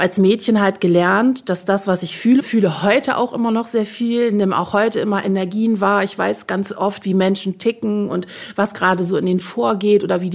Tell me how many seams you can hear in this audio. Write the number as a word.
one